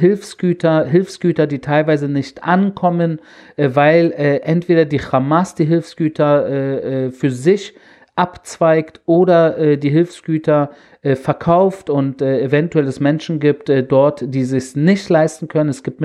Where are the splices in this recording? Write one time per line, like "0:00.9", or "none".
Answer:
none